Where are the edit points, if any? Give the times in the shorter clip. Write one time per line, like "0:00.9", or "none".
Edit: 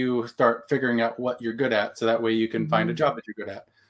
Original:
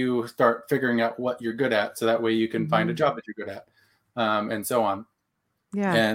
none